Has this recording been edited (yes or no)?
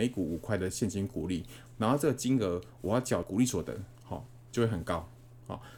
no